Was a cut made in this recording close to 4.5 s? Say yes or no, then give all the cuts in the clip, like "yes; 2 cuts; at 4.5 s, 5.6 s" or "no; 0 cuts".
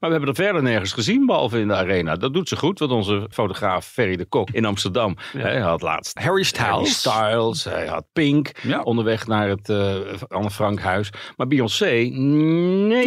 yes; 1 cut; at 4.5 s